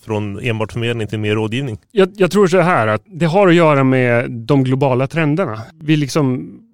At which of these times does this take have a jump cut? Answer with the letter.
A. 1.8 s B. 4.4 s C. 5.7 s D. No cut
A